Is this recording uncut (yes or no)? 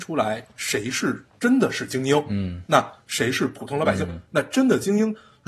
no